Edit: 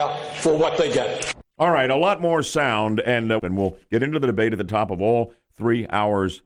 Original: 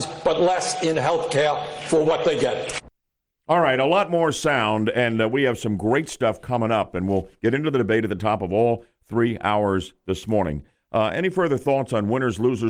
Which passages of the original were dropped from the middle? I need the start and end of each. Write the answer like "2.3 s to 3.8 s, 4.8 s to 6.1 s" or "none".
3.0 s to 3.4 s, 5.3 s to 6.9 s